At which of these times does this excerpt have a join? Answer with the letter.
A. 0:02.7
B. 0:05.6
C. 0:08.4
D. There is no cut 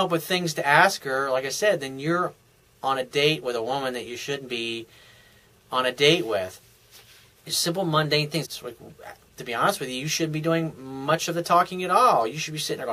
C